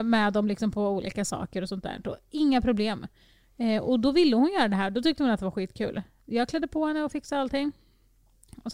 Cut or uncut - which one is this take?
uncut